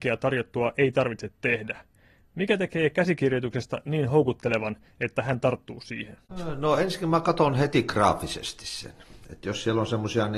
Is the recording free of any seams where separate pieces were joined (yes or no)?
yes